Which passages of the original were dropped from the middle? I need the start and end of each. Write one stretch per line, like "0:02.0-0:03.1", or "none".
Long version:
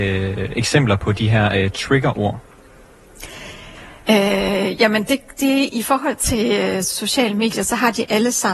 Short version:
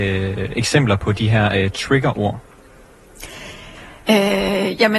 none